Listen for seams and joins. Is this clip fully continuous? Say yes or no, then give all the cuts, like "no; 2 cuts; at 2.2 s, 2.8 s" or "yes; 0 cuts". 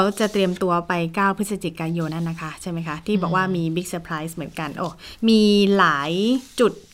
no; 1 cut; at 2.1 s